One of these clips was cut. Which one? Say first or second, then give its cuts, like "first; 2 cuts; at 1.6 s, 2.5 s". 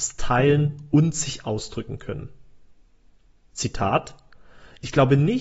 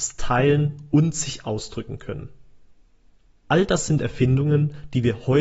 second; 1 cut; at 3.4 s